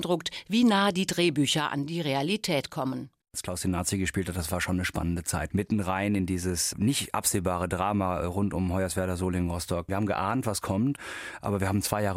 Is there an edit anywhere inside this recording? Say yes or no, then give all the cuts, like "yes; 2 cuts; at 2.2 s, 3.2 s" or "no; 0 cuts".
no; 0 cuts